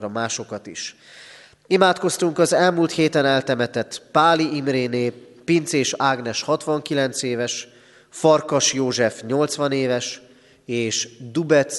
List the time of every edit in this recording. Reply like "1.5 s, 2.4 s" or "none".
none